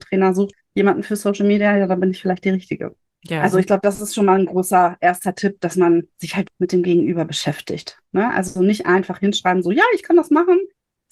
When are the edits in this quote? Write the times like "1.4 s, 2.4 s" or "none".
6.5 s